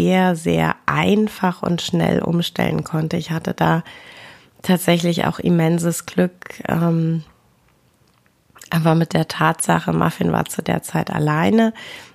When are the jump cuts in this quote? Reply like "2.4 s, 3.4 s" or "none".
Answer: none